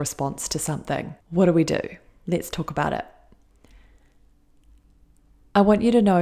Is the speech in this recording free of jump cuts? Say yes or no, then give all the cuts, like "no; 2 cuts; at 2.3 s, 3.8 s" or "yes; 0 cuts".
no; 1 cut; at 1.2 s